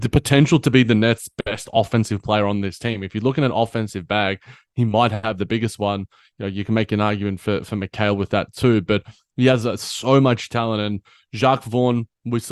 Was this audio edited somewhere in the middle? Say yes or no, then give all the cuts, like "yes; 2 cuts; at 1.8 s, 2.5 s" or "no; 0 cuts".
no; 0 cuts